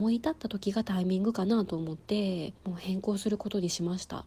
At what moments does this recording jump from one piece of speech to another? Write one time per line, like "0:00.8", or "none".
0:02.6